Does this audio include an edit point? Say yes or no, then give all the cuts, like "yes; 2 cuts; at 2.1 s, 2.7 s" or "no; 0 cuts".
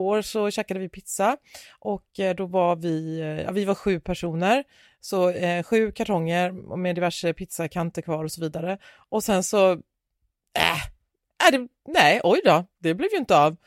no; 0 cuts